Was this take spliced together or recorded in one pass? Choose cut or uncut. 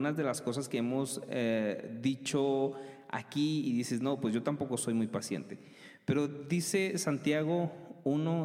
uncut